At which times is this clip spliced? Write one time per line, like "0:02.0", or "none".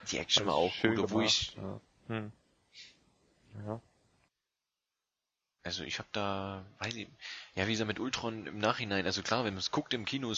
0:01.8
0:05.6